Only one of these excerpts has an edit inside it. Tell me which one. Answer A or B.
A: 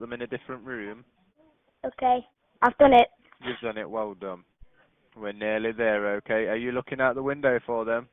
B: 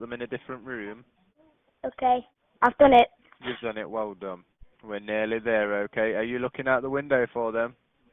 B